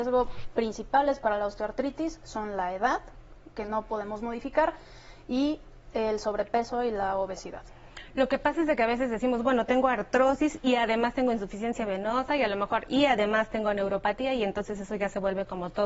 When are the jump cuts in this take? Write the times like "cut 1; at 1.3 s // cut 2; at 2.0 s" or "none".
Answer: none